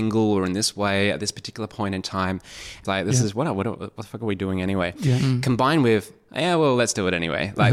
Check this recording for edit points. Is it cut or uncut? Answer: cut